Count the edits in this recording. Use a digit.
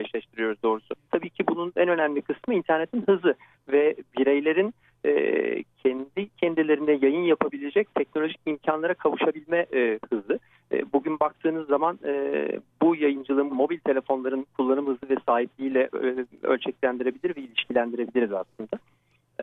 2